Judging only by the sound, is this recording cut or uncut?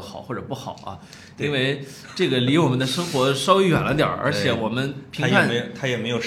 uncut